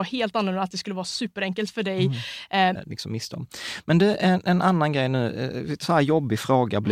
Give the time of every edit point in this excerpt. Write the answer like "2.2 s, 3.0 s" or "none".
2.8 s